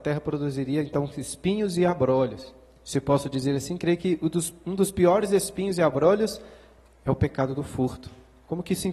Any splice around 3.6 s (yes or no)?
no